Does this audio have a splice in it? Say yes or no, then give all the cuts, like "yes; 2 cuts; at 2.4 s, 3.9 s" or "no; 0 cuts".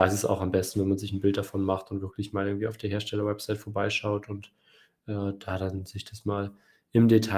no; 0 cuts